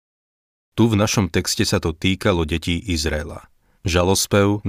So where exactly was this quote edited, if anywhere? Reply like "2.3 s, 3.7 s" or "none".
3.8 s